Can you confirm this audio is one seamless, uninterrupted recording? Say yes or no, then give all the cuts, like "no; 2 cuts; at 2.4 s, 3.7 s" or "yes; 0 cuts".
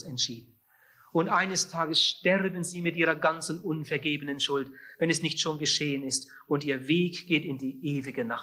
yes; 0 cuts